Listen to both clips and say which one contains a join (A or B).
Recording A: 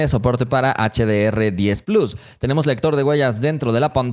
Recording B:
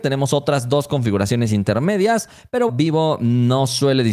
B